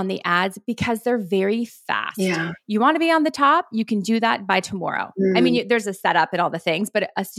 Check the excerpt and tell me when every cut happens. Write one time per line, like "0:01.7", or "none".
none